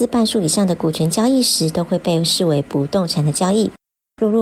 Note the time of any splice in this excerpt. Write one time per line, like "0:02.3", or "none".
none